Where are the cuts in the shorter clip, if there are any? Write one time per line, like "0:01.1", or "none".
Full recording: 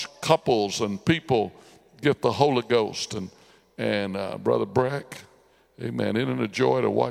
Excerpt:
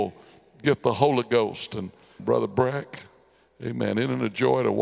0:02.2